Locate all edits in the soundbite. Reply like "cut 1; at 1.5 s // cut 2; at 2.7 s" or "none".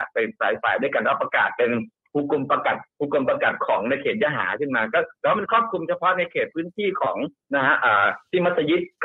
cut 1; at 2.9 s